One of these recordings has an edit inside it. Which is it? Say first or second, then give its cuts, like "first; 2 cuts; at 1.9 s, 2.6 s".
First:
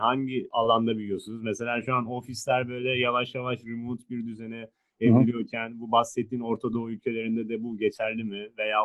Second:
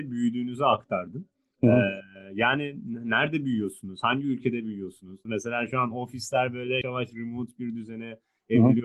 second; 2 cuts; at 5.3 s, 6.8 s